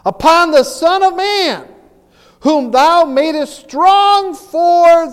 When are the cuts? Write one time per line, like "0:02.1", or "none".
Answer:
none